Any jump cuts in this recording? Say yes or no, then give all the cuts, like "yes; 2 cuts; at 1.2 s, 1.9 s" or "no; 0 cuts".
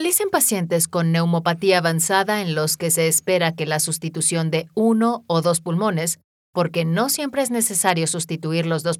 no; 0 cuts